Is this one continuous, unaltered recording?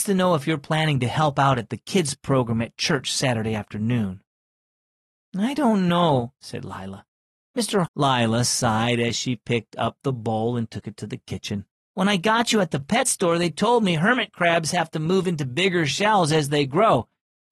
no; 2 cuts; at 7.9 s, 11.8 s

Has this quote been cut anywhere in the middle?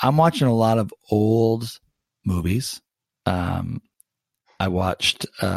no; 0 cuts

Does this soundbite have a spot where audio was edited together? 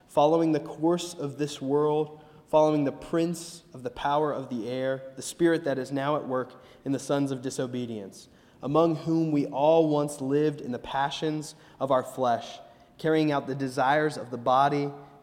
no; 0 cuts

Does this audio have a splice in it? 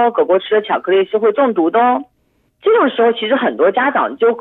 yes; 1 cut; at 2.5 s

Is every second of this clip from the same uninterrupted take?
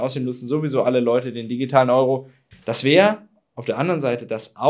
no; 1 cut; at 2.5 s

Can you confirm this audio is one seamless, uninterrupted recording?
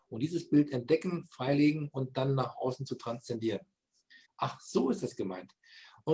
no; 1 cut; at 4.3 s

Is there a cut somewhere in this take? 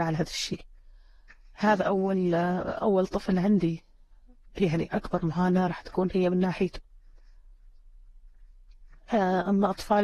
no; 0 cuts

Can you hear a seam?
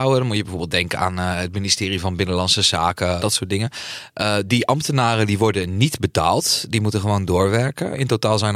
yes; 1 cut; at 3.2 s

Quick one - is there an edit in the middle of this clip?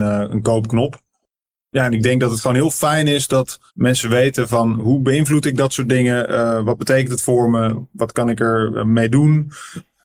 yes; 1 cut; at 3.7 s

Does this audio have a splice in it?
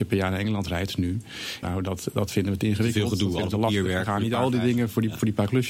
yes; 1 cut; at 1.6 s

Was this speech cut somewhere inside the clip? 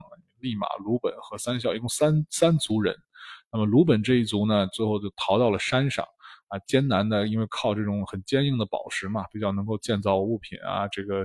no; 0 cuts

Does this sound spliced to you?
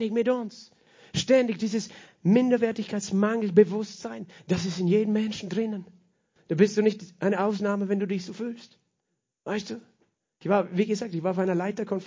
no; 0 cuts

